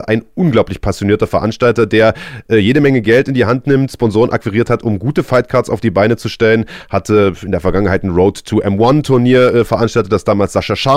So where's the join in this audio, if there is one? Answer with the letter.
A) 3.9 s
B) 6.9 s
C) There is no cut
C